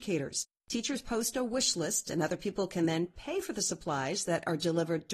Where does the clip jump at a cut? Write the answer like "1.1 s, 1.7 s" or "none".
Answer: none